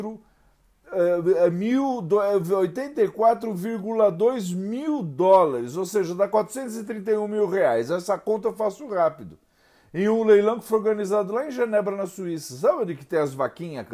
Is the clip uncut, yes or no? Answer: yes